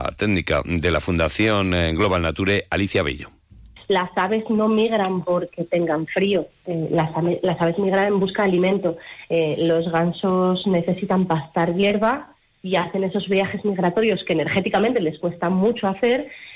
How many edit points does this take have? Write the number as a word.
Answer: one